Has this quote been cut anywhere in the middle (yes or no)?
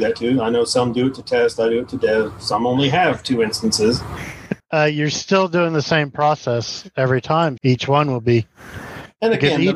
yes